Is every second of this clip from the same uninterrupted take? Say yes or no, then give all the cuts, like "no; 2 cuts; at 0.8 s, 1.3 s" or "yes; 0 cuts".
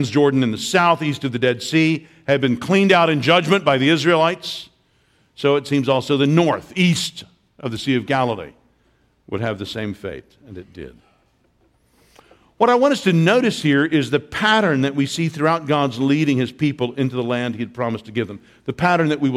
yes; 0 cuts